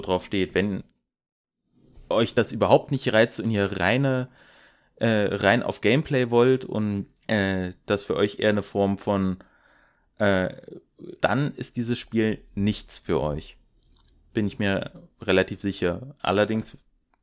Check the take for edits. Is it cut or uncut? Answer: cut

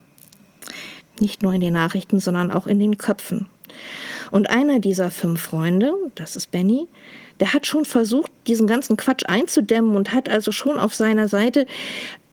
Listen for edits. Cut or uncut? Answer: cut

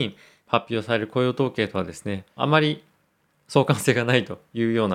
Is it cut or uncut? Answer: cut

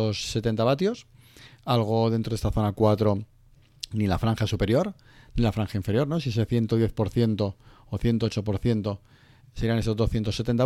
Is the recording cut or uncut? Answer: uncut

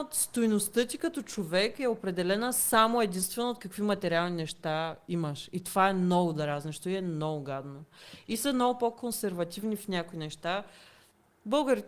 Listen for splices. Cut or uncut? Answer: uncut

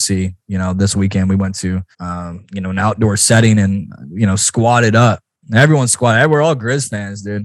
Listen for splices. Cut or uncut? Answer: cut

